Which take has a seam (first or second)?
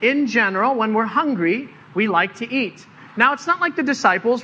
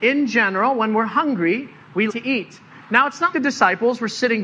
second